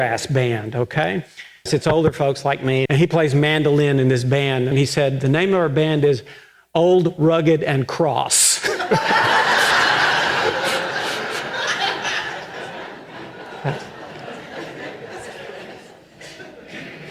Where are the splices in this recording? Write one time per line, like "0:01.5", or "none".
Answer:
0:01.7
0:02.9
0:04.7